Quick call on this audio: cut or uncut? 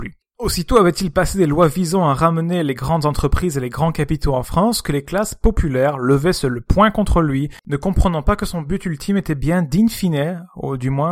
uncut